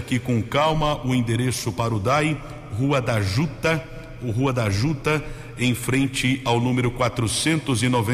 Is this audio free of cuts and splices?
yes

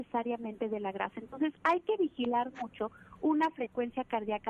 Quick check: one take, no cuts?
yes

